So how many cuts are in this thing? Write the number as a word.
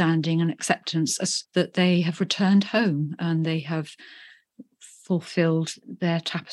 one